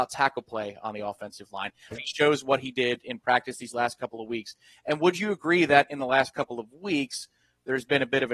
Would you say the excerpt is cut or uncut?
cut